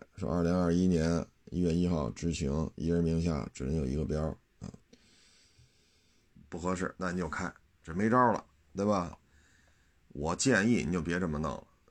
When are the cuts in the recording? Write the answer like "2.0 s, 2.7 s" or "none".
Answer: 6.3 s, 9.1 s